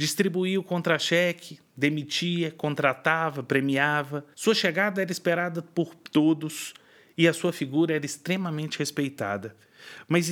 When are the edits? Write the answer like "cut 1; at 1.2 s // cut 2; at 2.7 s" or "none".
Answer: cut 1; at 4.3 s